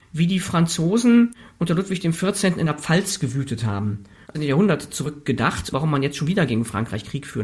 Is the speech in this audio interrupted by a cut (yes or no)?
yes